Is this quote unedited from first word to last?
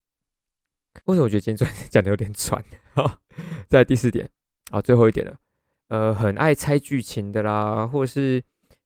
no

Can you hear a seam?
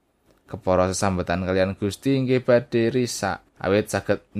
yes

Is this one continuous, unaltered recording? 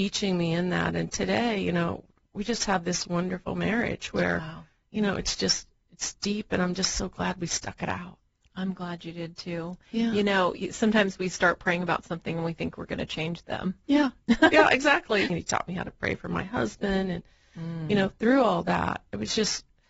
no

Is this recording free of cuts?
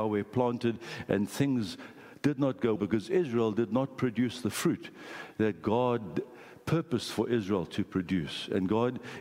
no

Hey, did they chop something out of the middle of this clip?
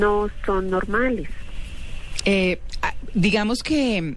yes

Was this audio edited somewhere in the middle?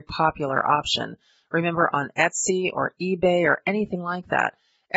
no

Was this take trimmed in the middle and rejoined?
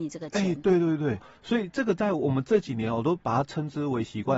yes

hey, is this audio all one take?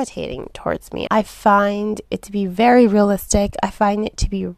no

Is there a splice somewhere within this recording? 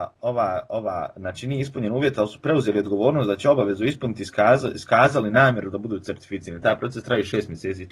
no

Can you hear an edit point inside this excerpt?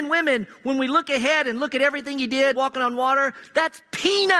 yes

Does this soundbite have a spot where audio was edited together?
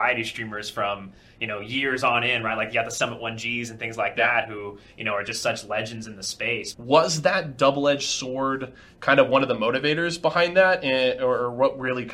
yes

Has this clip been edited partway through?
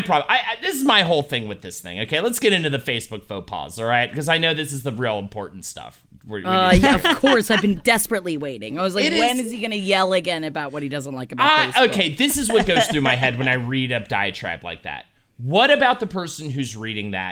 yes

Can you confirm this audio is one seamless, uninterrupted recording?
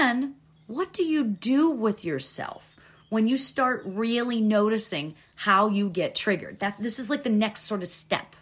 yes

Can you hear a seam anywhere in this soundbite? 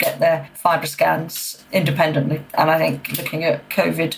no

